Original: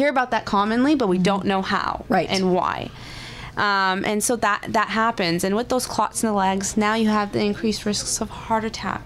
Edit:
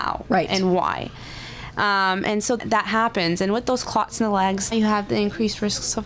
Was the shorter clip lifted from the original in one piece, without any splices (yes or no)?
no